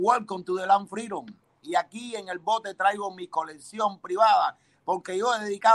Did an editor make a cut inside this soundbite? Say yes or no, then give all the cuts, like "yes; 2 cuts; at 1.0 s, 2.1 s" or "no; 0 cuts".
yes; 1 cut; at 1.6 s